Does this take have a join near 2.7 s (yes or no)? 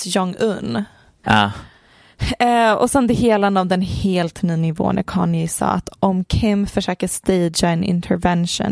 no